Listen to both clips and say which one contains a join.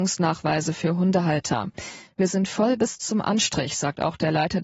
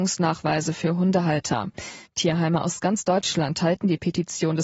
second; 1 cut; at 2.1 s

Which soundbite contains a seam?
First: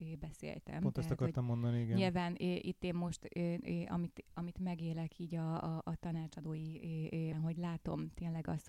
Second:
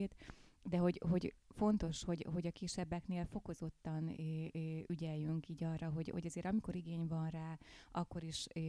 first; 1 cut; at 7.3 s

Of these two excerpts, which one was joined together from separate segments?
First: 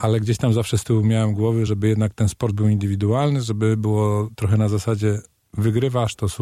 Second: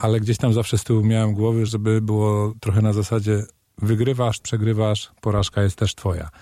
second; 2 cuts; at 1.7 s, 4.4 s

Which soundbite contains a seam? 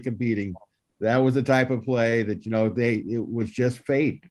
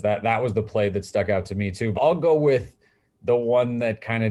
second; 1 cut; at 1.9 s

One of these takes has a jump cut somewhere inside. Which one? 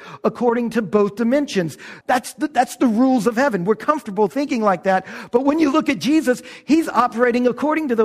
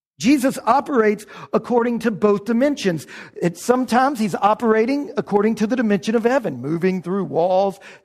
first; 1 cut; at 2.0 s

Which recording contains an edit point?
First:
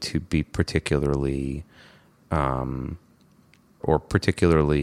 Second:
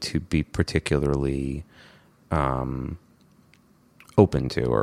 first; 1 cut; at 3.8 s

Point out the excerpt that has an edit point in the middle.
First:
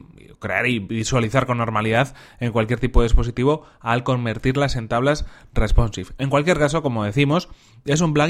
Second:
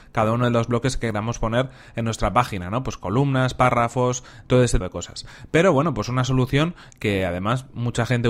second; 1 cut; at 4.8 s

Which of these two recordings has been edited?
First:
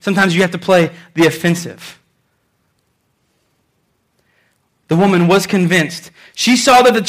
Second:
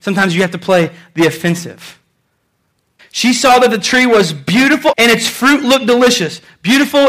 second; 2 cuts; at 3.0 s, 4.9 s

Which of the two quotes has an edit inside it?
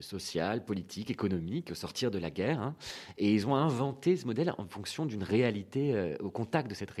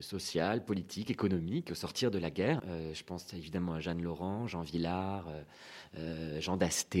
second; 1 cut; at 2.6 s

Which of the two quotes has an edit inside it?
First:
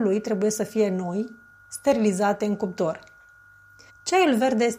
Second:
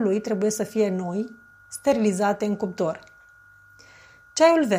first; 1 cut; at 3.9 s

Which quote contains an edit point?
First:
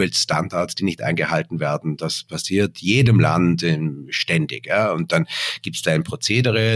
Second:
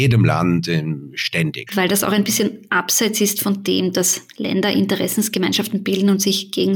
second; 1 cut; at 1.7 s

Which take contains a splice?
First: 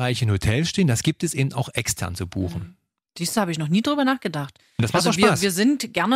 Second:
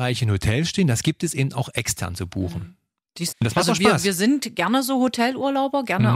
second; 1 cut; at 3.3 s

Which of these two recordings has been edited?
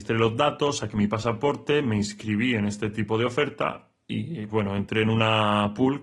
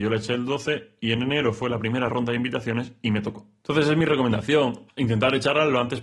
first; 1 cut; at 4.5 s

